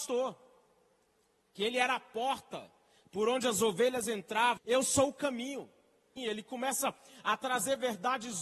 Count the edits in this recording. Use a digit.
2